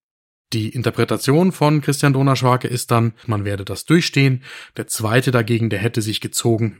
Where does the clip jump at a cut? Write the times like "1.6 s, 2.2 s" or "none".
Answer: 3.2 s